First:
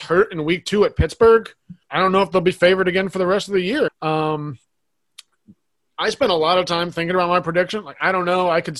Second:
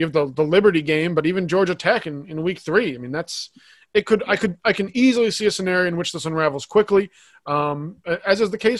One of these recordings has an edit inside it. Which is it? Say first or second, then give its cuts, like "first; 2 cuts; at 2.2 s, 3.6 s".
first; 2 cuts; at 1.8 s, 3.9 s